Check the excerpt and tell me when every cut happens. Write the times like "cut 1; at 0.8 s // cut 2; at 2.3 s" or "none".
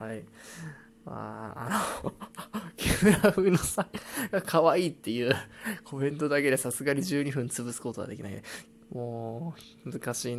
none